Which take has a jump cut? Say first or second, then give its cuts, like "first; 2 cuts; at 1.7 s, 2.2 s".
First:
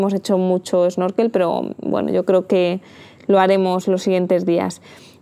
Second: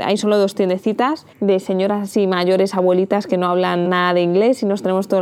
second; 2 cuts; at 1.3 s, 3.9 s